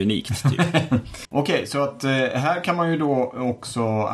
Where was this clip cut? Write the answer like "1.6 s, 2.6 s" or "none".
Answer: 1.2 s